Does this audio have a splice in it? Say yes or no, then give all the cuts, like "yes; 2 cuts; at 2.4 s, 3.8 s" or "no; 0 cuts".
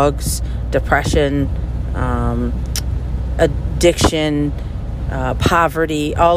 no; 0 cuts